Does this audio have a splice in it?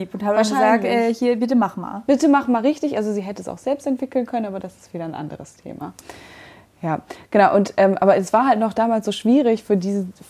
no; 0 cuts

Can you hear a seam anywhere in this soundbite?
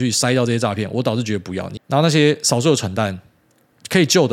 yes; 1 cut; at 1.8 s

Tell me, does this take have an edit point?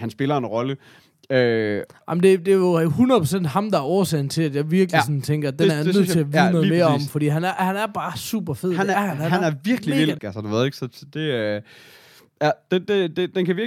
yes; 1 cut; at 10.2 s

